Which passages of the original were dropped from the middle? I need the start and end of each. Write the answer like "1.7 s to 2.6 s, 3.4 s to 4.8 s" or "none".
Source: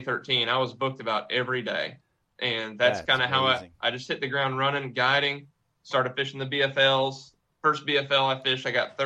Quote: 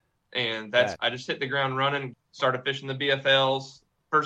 3.0 s to 3.8 s, 4.9 s to 5.6 s